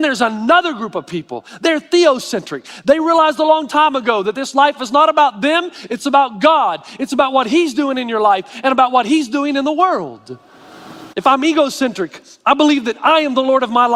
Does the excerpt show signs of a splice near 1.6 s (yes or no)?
no